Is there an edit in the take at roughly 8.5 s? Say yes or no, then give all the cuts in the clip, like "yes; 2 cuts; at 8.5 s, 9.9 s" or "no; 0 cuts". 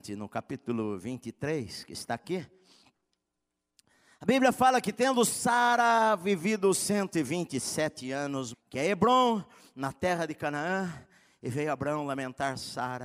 yes; 1 cut; at 8.5 s